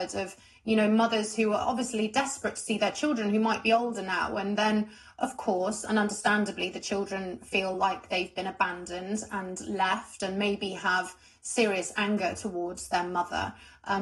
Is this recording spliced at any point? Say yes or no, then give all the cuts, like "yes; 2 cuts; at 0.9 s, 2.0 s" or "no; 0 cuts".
no; 0 cuts